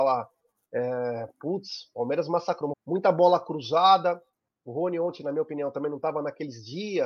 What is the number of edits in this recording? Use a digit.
1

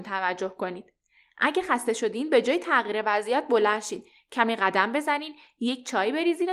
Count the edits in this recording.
0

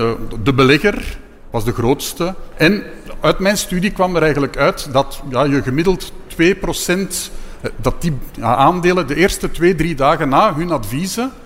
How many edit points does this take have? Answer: 1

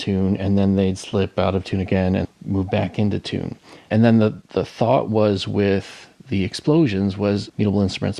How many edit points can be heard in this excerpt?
1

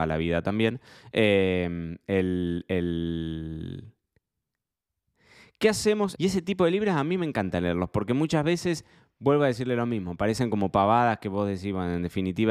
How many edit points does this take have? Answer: 1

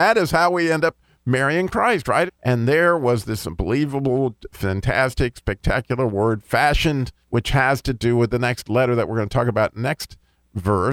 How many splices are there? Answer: 2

